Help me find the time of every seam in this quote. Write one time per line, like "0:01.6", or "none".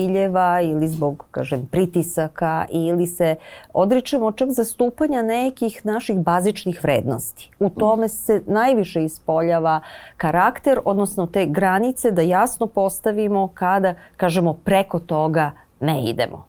none